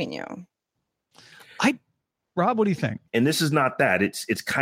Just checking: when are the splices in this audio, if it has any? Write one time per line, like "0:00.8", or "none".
0:03.1

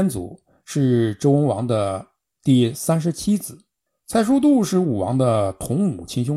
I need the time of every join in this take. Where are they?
0:03.9

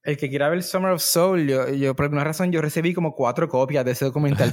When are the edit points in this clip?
none

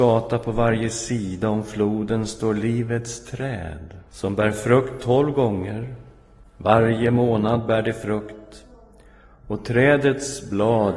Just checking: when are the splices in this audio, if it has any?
0:04.1

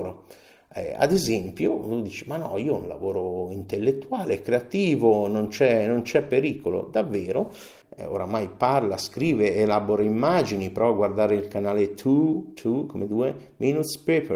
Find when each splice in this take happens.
0:07.8

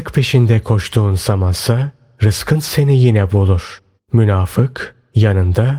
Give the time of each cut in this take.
0:04.0

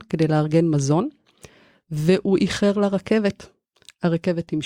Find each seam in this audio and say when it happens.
none

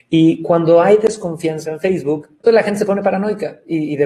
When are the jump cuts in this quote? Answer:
0:02.4

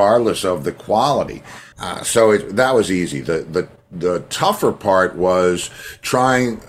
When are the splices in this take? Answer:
0:01.7

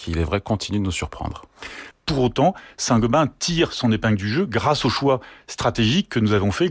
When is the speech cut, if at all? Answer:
0:01.9

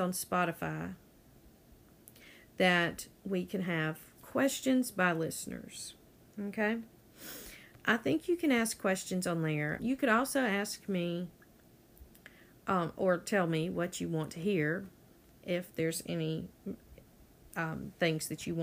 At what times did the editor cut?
0:09.8

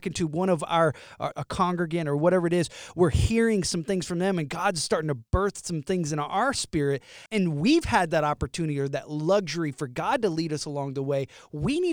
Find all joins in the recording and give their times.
0:01.3
0:07.3

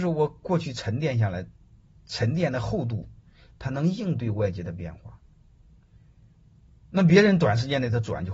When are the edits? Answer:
none

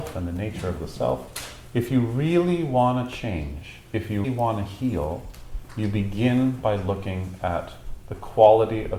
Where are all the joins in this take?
0:01.7
0:04.2

